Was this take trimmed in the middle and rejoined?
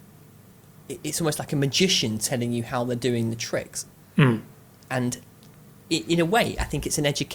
no; 0 cuts

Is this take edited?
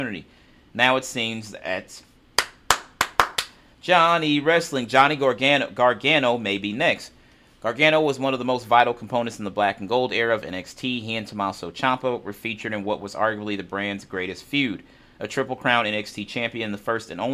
no; 0 cuts

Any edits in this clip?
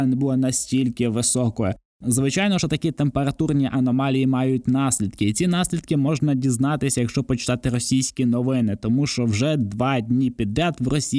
no; 0 cuts

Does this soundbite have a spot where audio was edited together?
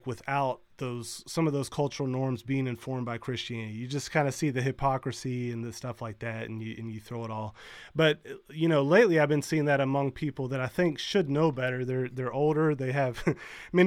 no; 0 cuts

